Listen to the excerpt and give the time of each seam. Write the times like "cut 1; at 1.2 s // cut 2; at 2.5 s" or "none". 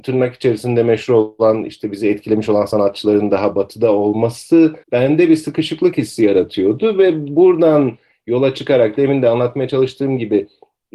cut 1; at 4.8 s